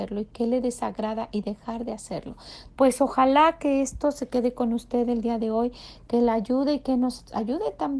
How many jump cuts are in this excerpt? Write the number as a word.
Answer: one